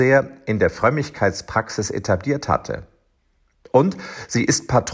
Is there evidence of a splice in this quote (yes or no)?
yes